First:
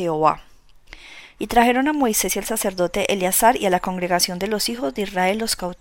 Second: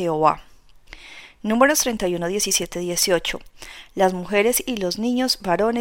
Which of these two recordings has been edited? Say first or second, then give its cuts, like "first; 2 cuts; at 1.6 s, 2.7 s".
first; 1 cut; at 1.4 s